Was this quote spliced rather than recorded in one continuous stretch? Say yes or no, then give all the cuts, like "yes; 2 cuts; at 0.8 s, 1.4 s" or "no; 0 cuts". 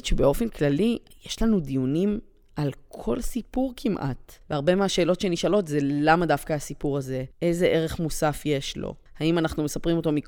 no; 0 cuts